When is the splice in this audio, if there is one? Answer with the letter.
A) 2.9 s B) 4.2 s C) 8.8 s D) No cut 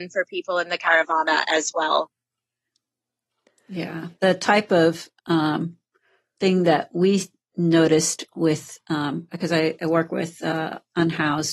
B